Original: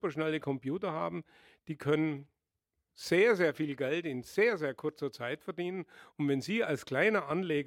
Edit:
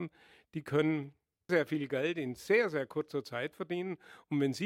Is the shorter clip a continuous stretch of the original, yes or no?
no